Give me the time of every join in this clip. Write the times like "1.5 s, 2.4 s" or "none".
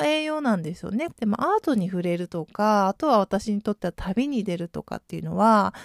1.1 s